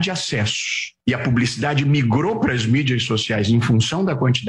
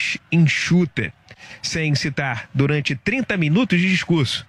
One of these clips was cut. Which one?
first; 1 cut; at 1.0 s

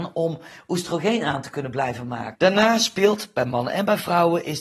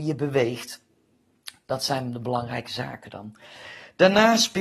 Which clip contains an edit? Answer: first; 1 cut; at 2.3 s

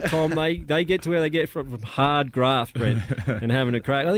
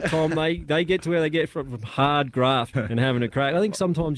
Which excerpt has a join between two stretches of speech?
second; 1 cut; at 2.7 s

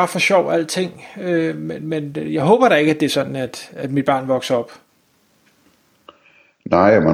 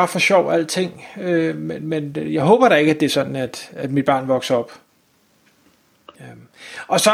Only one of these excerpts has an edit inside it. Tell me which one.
second; 1 cut; at 6.1 s

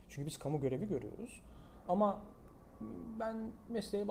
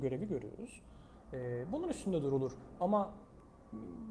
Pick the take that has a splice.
first; 1 cut; at 1.9 s

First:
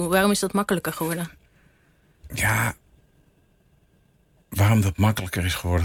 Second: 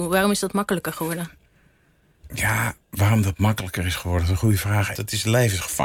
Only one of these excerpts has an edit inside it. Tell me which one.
second; 2 cuts; at 2.8 s, 4.9 s

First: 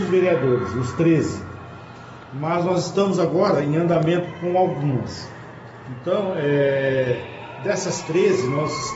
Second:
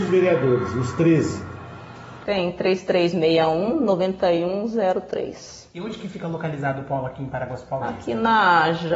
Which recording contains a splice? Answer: second; 1 cut; at 2.3 s

